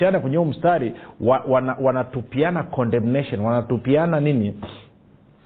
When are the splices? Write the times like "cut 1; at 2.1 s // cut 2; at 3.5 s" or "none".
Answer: none